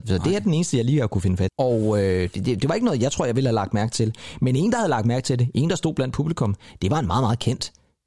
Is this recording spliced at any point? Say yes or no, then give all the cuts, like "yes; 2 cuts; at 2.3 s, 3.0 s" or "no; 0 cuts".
yes; 1 cut; at 1.5 s